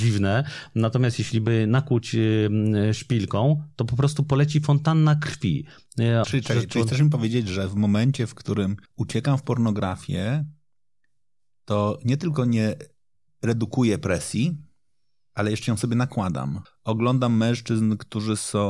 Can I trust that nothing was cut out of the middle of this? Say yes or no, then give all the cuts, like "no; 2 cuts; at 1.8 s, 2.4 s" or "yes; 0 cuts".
no; 3 cuts; at 6.2 s, 8.9 s, 16.7 s